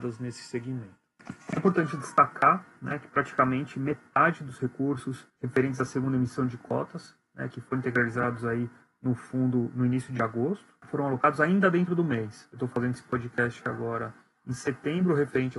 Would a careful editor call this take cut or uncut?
uncut